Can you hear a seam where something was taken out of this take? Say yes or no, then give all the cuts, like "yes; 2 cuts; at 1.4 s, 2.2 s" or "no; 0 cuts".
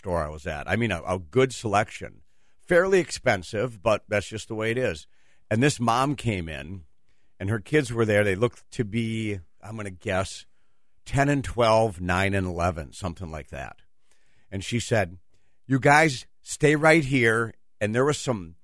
no; 0 cuts